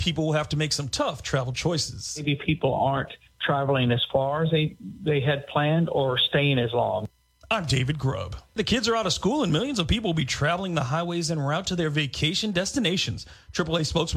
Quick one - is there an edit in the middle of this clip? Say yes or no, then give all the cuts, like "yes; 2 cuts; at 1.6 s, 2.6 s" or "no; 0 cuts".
yes; 1 cut; at 8.6 s